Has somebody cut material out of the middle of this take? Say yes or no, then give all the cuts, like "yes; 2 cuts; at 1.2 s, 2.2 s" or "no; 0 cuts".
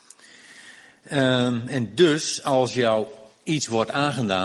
no; 0 cuts